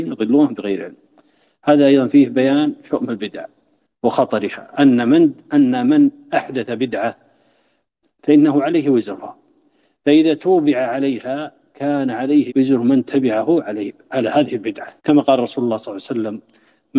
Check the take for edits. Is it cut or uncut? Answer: cut